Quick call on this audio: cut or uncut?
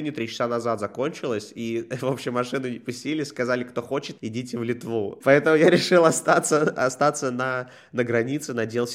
cut